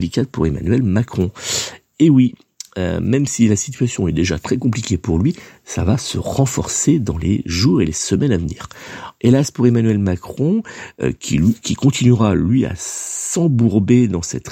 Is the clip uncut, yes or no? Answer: no